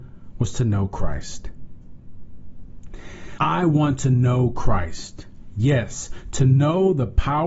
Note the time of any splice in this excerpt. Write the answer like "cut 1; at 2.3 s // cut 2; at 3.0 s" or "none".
cut 1; at 3.4 s